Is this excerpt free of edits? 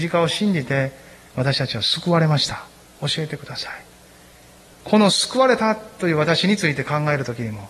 no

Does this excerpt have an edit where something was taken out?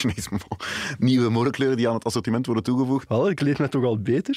yes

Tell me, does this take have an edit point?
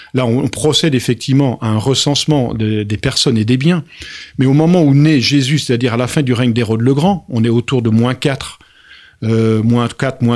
no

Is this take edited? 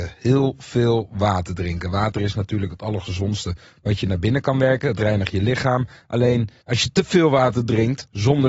no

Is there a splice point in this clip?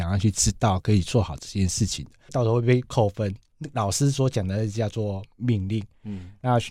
yes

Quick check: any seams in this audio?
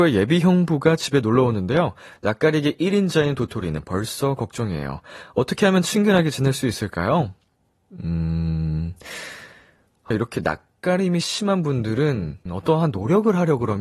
yes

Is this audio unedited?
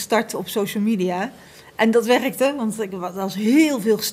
yes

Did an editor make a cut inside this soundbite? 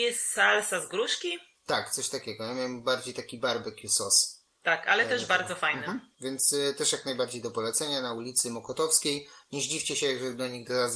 yes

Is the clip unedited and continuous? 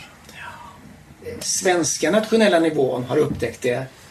no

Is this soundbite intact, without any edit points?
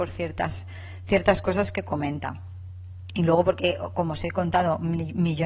yes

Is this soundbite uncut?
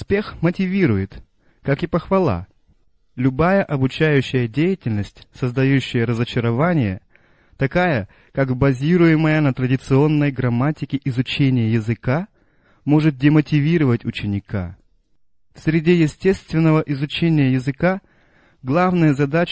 yes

